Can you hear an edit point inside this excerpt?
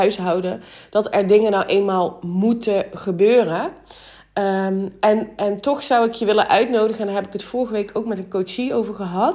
no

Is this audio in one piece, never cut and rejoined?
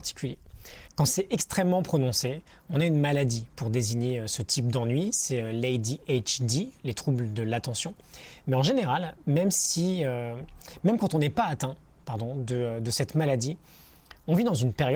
yes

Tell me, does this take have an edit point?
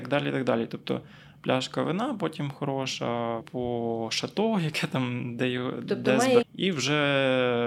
yes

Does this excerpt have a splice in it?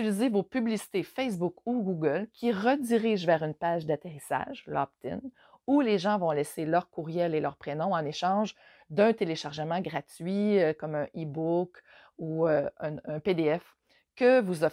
no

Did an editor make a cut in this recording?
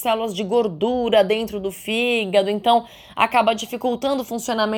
no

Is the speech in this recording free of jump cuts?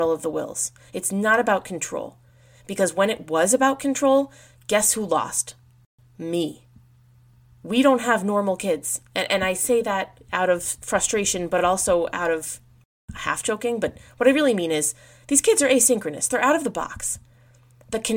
yes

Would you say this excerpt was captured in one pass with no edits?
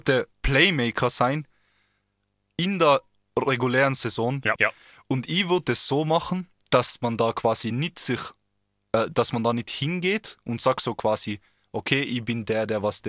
no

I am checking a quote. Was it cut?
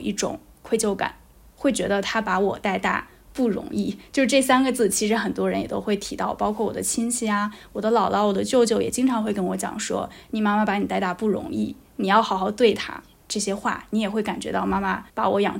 yes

